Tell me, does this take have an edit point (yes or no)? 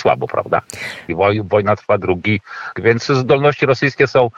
yes